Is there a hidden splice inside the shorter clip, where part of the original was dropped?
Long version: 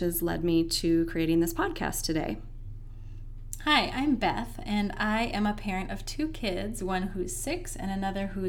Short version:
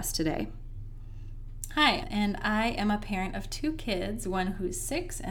yes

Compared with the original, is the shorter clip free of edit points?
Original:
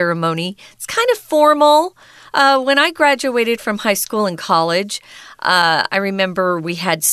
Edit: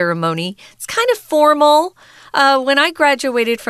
yes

